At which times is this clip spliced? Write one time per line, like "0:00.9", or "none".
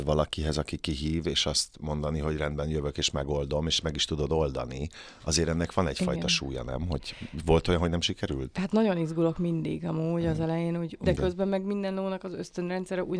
0:11.0

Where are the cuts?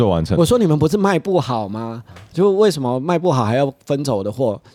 none

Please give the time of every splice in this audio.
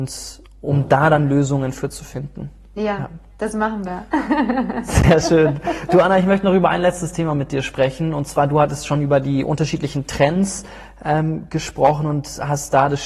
none

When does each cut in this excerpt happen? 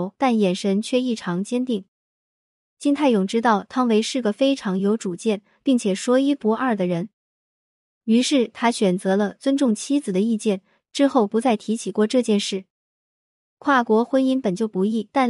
none

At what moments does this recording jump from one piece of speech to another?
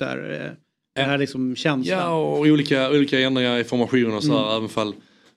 none

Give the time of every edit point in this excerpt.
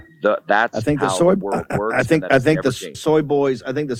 0:02.9

